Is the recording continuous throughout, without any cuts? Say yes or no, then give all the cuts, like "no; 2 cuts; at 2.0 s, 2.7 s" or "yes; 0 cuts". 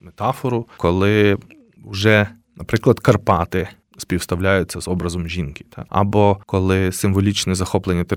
yes; 0 cuts